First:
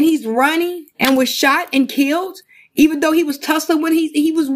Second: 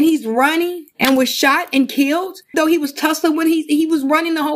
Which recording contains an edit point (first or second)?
second